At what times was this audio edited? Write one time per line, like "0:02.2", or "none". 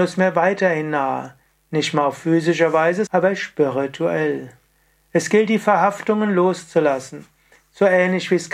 0:03.1